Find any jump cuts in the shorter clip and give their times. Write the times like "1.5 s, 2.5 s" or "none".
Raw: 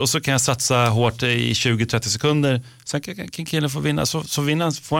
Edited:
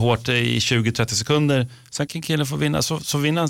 2.1 s